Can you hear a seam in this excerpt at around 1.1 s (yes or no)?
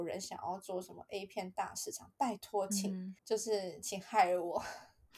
no